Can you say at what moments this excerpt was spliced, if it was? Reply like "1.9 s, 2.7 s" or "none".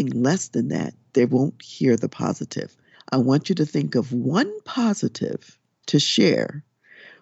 2.9 s